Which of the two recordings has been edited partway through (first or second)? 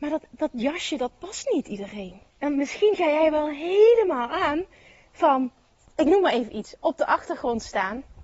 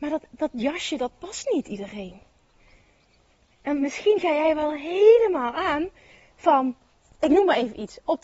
first